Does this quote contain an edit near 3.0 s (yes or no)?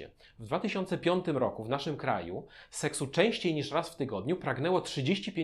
no